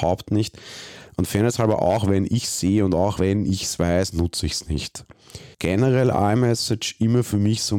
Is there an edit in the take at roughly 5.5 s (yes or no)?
yes